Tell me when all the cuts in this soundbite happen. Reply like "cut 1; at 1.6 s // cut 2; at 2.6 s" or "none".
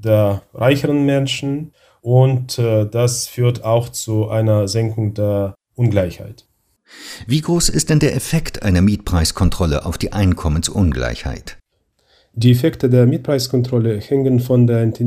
none

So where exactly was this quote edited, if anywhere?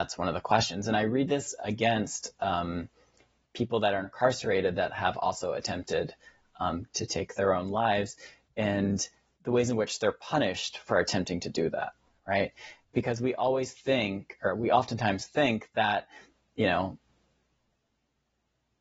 none

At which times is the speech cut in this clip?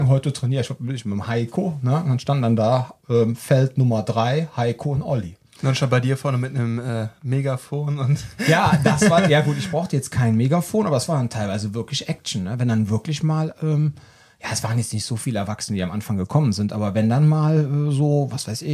none

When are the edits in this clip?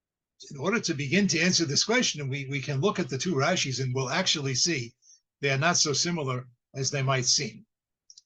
none

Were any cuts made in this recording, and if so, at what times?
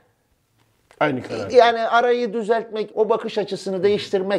cut 1; at 2.9 s

